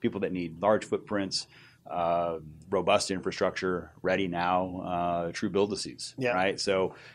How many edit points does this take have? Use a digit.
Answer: 0